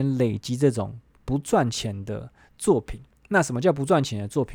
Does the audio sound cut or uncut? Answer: uncut